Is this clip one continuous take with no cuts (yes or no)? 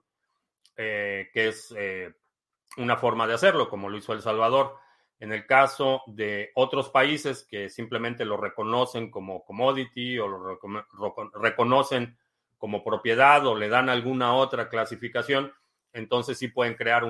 yes